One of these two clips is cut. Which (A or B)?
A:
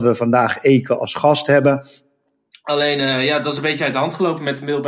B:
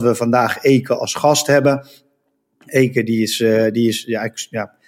A